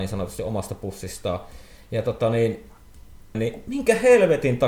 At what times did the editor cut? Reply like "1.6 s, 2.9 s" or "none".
3.3 s